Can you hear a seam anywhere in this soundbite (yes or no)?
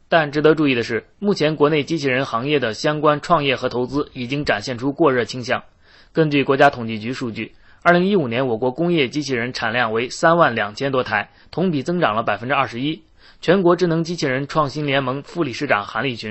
no